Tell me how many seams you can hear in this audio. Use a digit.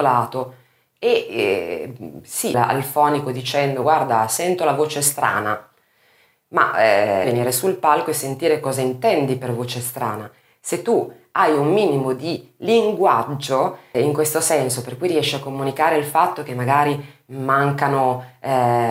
3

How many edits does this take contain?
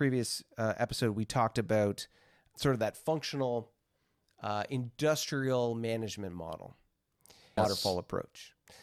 2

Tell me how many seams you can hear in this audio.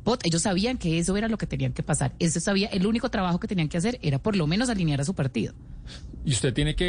0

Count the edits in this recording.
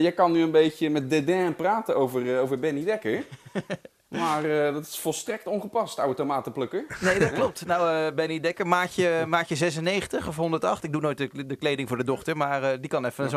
0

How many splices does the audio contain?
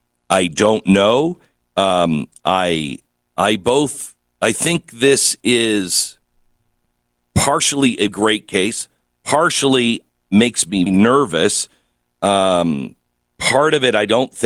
3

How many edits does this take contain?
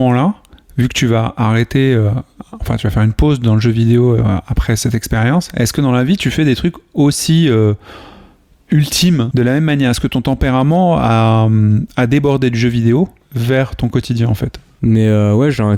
1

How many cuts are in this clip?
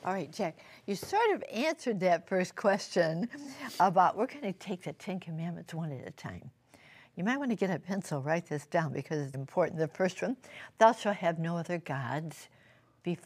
1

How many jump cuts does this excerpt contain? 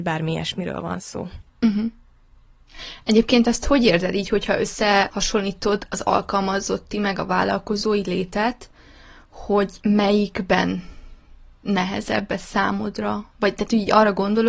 0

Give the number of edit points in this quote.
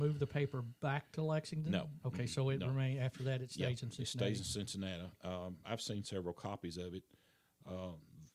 0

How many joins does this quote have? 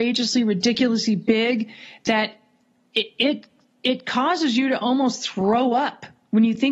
0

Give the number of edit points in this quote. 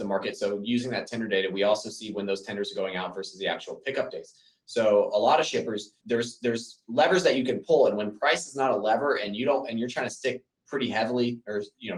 1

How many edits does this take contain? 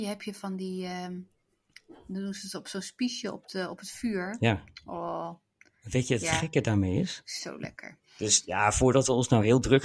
1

